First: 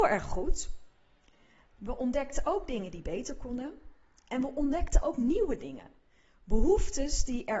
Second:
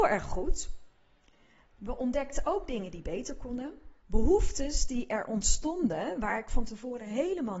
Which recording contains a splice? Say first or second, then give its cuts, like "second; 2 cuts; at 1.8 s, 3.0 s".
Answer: second; 1 cut; at 4.0 s